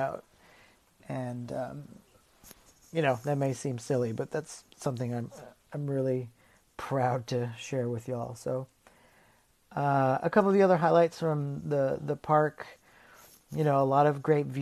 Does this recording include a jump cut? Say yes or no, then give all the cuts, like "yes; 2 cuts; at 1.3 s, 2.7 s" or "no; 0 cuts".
no; 0 cuts